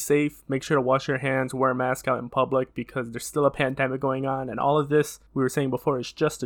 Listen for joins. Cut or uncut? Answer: cut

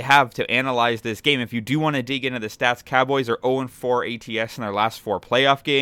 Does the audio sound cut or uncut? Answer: uncut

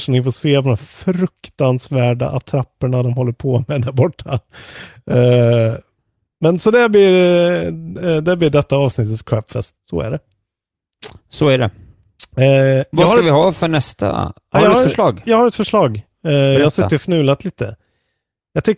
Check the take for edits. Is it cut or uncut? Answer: cut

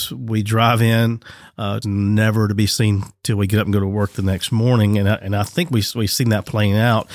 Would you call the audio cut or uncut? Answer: cut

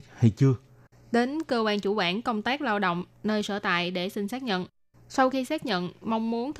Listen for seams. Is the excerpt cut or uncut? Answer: cut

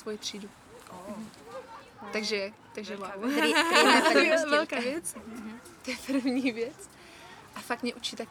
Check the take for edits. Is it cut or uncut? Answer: cut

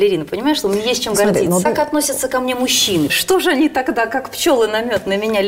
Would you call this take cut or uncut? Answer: uncut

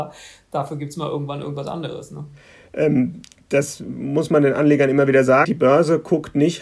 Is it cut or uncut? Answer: cut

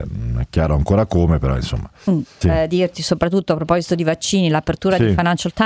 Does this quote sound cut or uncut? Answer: cut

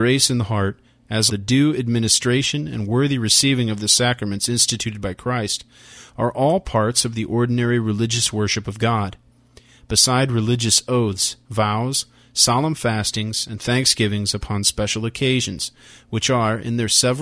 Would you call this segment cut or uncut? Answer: cut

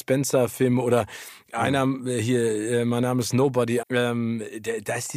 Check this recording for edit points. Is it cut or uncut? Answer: cut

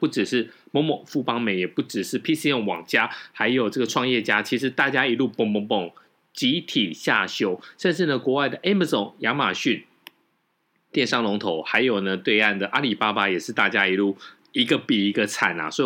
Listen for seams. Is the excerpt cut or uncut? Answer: uncut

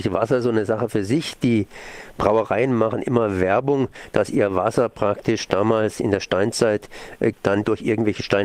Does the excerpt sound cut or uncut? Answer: cut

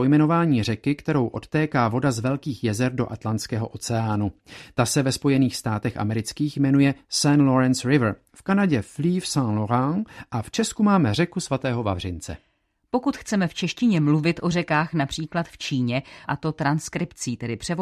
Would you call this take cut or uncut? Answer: cut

